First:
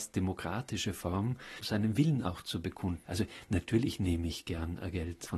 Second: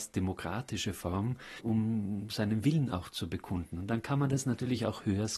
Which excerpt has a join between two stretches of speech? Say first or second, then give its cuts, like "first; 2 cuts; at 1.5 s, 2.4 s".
first; 2 cuts; at 1.6 s, 3.0 s